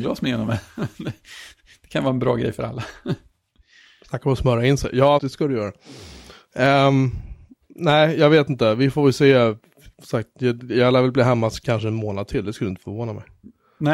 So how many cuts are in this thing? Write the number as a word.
one